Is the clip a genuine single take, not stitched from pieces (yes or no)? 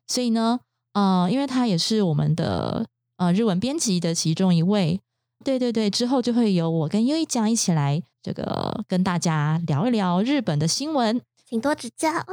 no